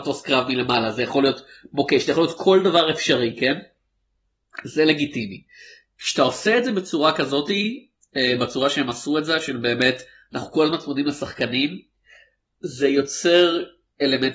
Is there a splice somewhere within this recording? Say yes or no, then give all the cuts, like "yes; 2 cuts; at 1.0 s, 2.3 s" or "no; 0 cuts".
no; 0 cuts